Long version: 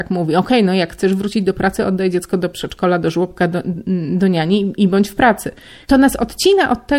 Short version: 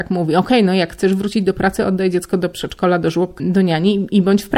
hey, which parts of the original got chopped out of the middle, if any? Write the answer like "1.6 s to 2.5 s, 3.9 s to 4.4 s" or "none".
3.4 s to 4.1 s